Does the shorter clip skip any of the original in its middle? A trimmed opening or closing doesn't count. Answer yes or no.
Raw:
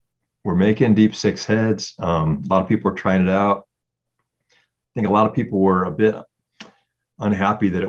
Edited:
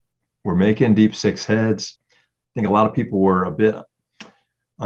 yes